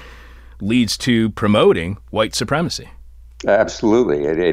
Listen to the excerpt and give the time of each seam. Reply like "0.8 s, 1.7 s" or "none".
none